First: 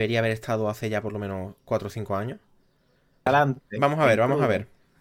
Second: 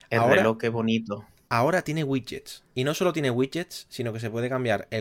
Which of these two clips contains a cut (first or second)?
first